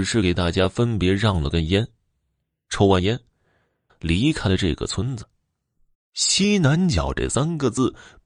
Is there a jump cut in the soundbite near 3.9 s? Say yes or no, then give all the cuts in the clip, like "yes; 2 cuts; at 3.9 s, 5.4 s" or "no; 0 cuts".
yes; 2 cuts; at 3.9 s, 5.9 s